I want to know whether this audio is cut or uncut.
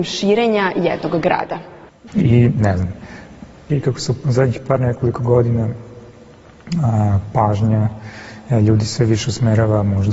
cut